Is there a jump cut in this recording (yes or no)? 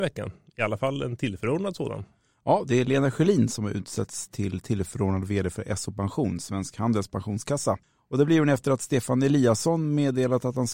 no